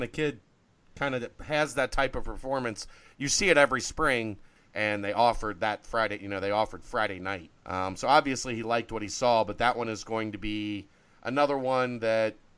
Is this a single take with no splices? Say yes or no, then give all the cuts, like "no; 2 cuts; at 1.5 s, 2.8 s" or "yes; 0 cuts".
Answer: no; 2 cuts; at 4.6 s, 7.6 s